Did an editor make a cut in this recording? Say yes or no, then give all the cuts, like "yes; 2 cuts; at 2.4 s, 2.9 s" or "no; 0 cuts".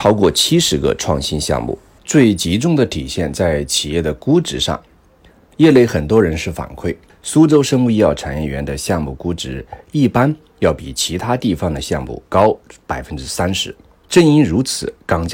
yes; 2 cuts; at 2.0 s, 7.1 s